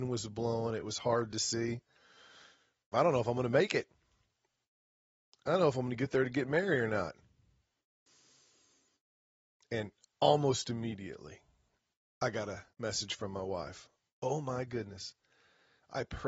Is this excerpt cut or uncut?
cut